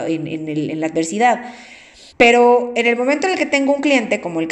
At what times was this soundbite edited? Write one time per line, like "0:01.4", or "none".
0:02.1